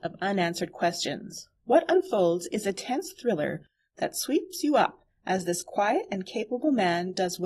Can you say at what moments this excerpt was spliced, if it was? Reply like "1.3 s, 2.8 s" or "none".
1.6 s